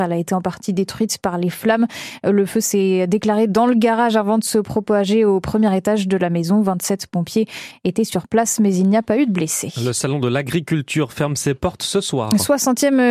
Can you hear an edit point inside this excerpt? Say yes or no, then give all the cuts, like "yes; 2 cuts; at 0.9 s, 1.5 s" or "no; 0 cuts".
no; 0 cuts